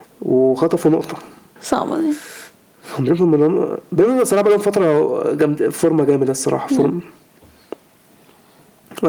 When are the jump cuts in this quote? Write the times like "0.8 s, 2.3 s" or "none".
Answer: 1.6 s